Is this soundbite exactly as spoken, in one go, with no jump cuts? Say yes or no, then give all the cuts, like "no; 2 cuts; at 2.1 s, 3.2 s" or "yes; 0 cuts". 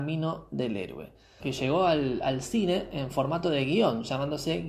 no; 1 cut; at 1.4 s